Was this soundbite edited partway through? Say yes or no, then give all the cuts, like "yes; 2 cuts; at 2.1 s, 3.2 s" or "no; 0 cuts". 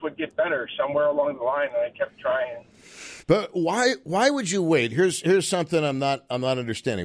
yes; 1 cut; at 3.2 s